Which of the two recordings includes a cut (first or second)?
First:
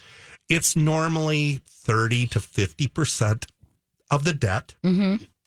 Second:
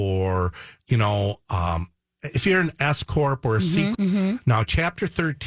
second